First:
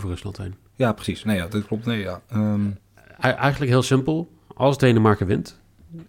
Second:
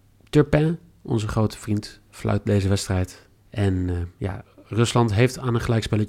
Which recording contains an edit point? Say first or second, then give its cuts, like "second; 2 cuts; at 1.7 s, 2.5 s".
second; 1 cut; at 3.4 s